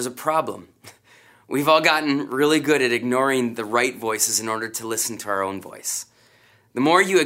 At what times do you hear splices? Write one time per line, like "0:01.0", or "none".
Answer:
none